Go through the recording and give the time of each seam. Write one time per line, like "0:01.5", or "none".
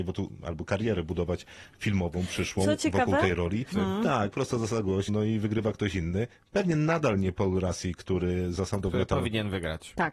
0:03.7
0:05.1

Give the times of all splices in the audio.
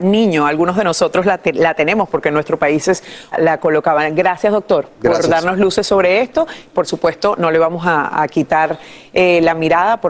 0:03.3

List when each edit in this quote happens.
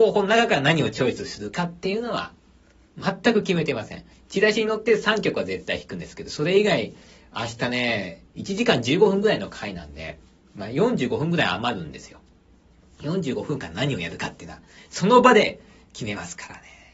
none

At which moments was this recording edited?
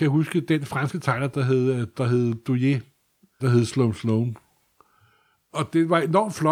0:03.4

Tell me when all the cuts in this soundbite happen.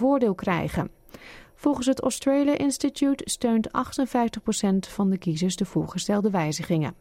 none

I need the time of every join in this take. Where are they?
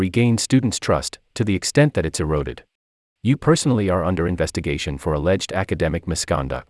0:03.2

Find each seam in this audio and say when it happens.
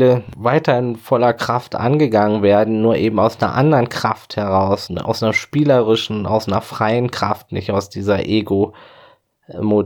0:04.9

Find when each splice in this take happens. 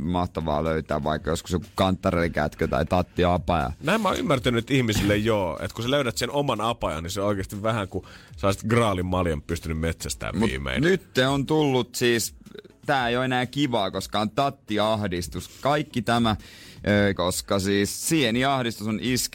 0:17.2

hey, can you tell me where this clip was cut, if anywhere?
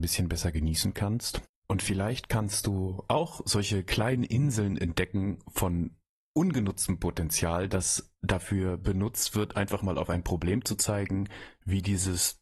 none

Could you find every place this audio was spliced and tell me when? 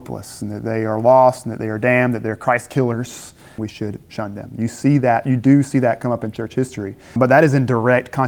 0:03.6
0:07.2

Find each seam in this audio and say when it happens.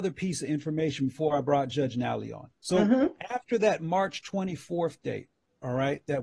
0:02.6

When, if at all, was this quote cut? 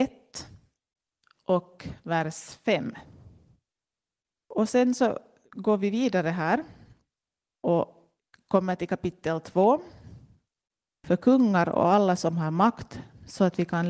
0:10.9

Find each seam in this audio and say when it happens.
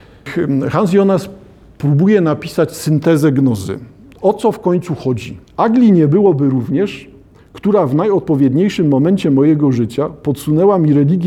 0:05.5
0:07.3

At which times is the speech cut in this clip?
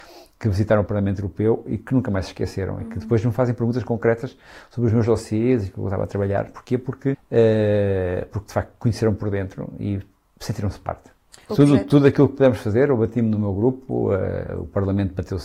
0:07.1
0:11.5

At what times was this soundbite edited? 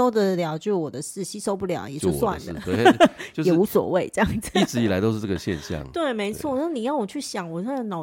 none

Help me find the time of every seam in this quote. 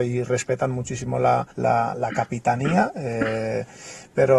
0:01.5

